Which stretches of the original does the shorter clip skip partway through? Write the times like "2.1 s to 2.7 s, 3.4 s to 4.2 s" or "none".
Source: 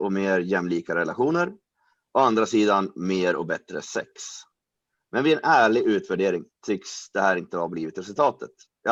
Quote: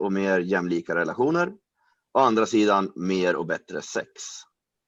none